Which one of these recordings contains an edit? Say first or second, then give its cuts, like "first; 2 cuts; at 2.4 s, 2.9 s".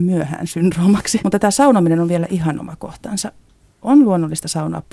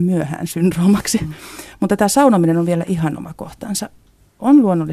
first; 1 cut; at 1.2 s